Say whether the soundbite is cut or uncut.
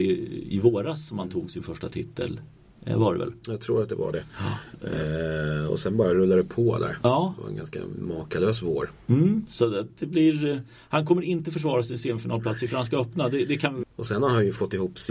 cut